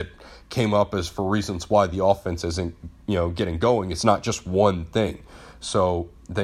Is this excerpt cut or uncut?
uncut